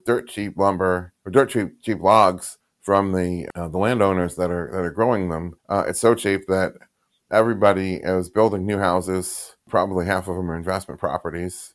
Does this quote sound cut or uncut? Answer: cut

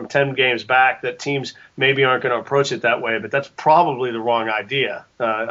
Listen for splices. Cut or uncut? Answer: uncut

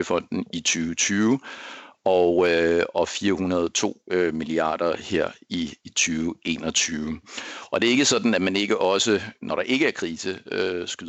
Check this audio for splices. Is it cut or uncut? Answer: uncut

